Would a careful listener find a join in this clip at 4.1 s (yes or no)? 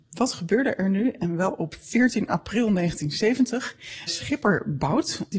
yes